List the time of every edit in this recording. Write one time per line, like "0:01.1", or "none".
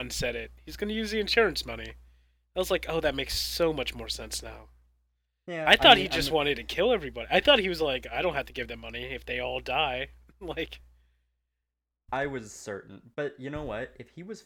none